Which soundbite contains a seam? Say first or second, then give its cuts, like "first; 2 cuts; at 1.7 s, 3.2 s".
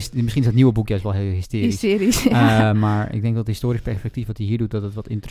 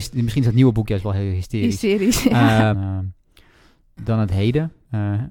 second; 1 cut; at 2.7 s